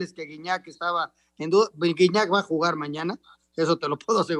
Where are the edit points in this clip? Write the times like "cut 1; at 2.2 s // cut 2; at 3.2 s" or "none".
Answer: none